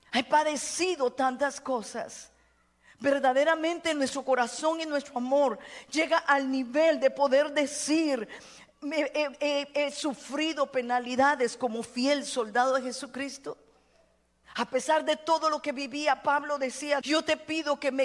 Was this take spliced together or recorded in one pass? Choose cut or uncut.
cut